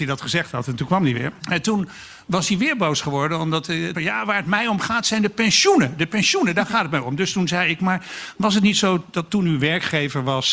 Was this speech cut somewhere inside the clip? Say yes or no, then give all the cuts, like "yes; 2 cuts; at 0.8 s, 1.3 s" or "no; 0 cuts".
yes; 2 cuts; at 1.4 s, 3.9 s